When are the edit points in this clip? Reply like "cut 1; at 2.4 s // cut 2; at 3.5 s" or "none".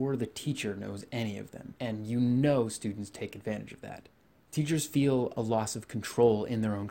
cut 1; at 1.8 s

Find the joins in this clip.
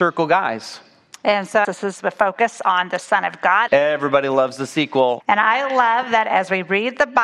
cut 1; at 1.6 s // cut 2; at 3.7 s // cut 3; at 5.2 s

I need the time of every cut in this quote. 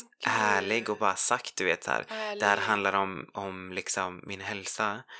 none

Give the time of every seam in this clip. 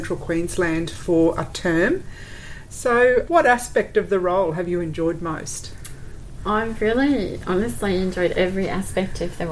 cut 1; at 3.3 s

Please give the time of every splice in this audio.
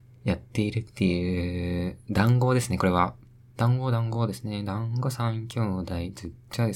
cut 1; at 3.5 s

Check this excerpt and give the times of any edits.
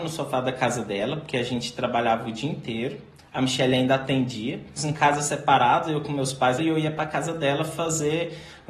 cut 1; at 4.8 s // cut 2; at 6.6 s

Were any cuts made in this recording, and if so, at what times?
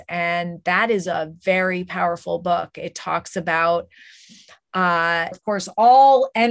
cut 1; at 5.3 s

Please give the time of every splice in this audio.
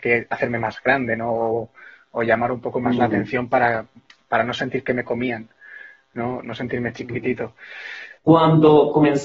cut 1; at 8.2 s

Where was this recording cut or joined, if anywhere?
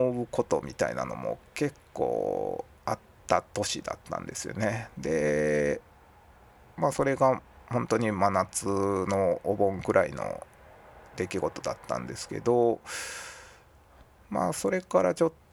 none

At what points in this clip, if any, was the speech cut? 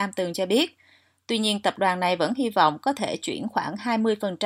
none

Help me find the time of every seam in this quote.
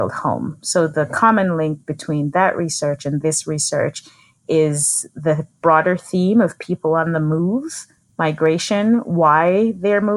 none

